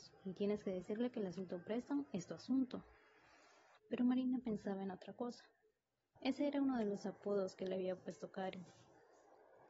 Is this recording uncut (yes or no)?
no